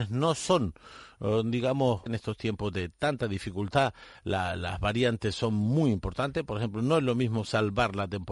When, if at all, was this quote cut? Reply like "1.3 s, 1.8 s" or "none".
2.1 s